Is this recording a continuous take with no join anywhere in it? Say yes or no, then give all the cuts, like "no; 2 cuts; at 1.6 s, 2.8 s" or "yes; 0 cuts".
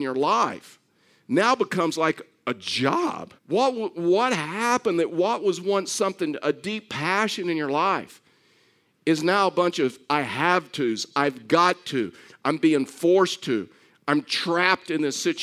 no; 1 cut; at 3.4 s